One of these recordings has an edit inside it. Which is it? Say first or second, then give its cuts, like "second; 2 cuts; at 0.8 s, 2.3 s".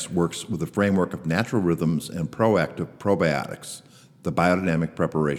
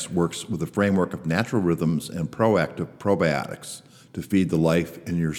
second; 1 cut; at 4.0 s